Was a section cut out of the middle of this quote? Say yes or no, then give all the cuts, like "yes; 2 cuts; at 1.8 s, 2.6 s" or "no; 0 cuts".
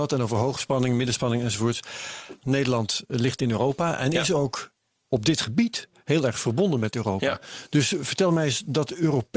yes; 1 cut; at 2.4 s